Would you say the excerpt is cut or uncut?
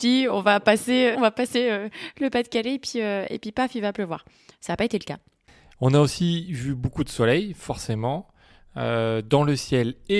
cut